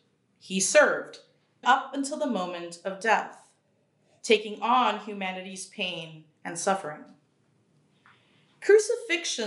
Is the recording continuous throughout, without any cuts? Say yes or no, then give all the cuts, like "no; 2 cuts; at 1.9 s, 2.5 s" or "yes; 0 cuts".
no; 1 cut; at 1.6 s